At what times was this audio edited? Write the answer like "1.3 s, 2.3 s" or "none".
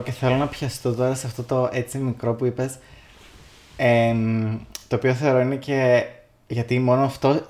none